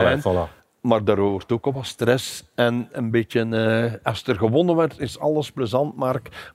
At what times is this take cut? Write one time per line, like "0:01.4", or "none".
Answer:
none